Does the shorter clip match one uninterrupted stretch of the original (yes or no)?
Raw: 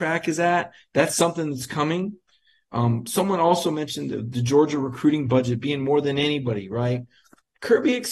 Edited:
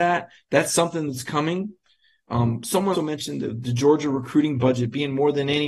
no